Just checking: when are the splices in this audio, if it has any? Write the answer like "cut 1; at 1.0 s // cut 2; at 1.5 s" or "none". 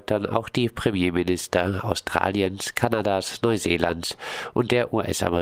none